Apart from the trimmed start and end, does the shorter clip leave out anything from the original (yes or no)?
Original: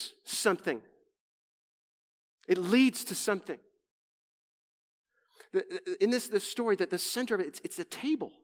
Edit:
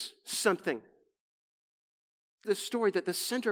yes